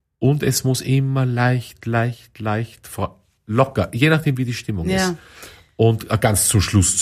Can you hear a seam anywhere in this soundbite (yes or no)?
no